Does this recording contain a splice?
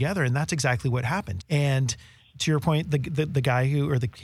yes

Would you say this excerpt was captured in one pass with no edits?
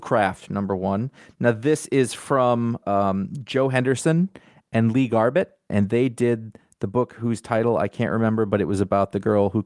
no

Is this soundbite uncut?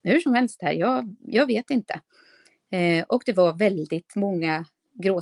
yes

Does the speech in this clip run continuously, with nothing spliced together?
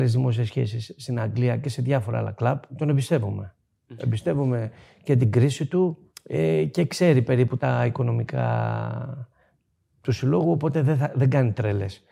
yes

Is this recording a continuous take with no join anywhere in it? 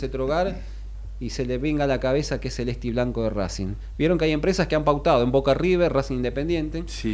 yes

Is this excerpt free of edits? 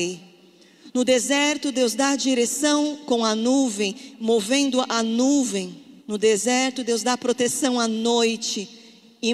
no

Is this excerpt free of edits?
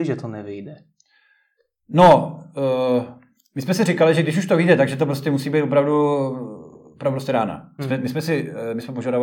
no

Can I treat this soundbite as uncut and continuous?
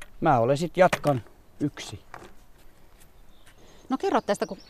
yes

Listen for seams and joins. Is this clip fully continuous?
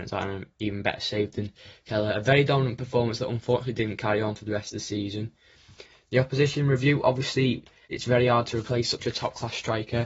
no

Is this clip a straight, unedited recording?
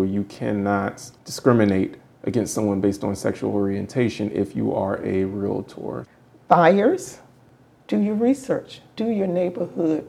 yes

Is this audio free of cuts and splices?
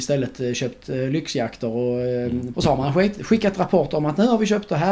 no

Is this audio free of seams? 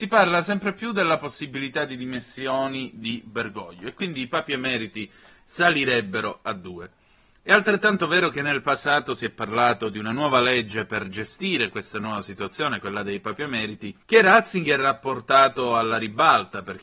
no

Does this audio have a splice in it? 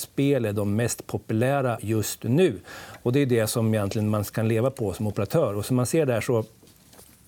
no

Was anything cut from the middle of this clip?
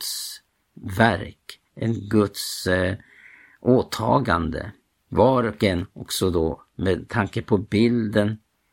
yes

